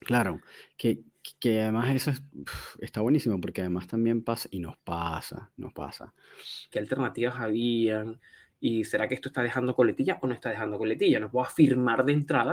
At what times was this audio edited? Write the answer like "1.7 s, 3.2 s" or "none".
6.7 s